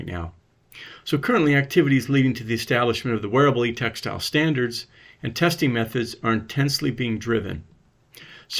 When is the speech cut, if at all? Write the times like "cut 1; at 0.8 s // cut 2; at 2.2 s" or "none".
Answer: none